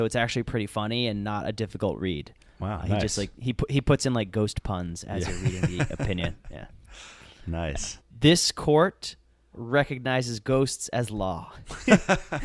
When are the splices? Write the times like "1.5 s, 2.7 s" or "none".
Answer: 8.0 s, 9.5 s